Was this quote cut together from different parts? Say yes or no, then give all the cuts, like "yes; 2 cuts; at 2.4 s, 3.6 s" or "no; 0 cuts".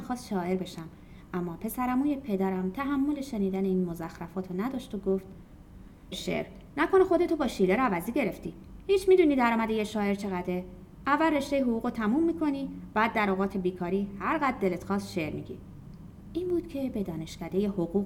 yes; 1 cut; at 6.1 s